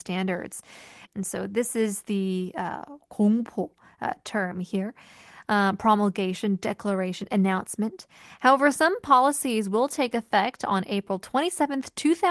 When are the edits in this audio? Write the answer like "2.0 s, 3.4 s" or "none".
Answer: 1.1 s